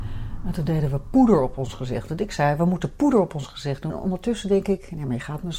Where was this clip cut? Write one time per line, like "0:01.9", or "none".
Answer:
0:03.9